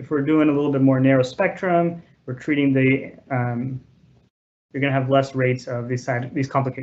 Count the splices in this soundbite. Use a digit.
1